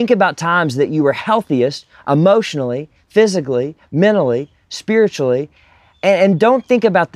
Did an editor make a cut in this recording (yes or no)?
no